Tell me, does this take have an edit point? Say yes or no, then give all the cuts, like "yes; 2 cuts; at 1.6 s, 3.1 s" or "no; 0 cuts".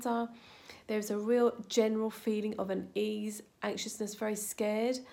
no; 0 cuts